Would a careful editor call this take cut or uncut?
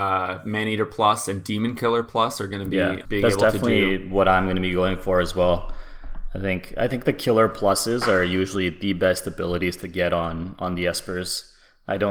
cut